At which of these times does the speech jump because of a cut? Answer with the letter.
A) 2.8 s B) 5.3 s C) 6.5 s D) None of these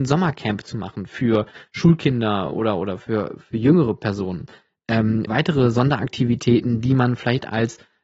B